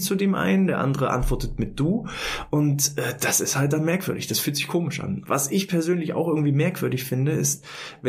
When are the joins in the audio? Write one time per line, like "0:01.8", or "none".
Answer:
0:05.2